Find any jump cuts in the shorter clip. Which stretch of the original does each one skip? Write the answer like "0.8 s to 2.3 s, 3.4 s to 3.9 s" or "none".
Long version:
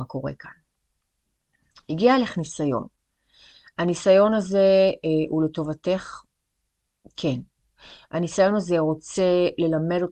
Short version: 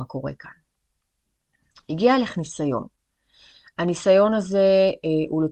none